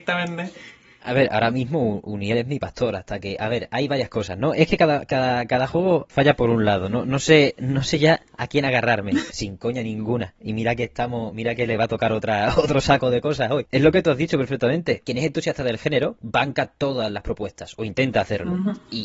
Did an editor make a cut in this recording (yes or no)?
yes